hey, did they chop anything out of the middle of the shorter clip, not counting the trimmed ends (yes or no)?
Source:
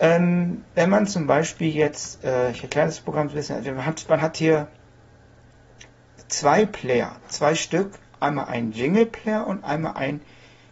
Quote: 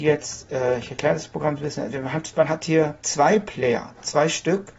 yes